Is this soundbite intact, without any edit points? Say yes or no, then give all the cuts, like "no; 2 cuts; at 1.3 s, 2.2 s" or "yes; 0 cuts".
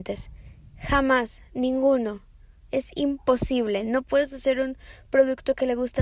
yes; 0 cuts